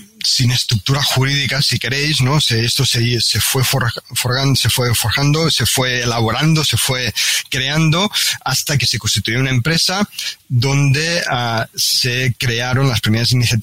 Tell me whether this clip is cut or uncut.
uncut